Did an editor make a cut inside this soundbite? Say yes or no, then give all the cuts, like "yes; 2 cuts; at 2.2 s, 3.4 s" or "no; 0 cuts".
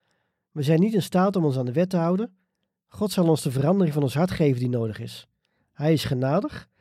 no; 0 cuts